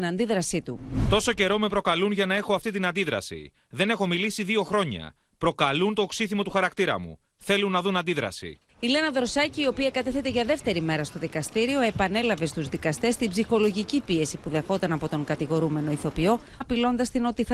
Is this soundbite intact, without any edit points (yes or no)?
no